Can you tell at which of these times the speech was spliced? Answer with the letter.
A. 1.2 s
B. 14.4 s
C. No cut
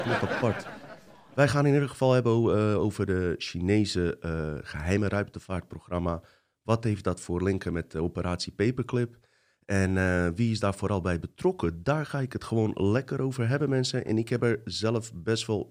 C